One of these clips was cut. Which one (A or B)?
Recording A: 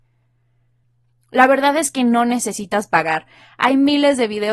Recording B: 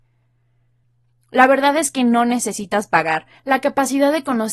B